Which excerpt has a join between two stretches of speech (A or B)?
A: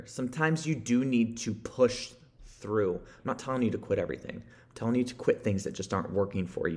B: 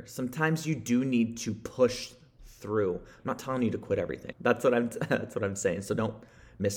B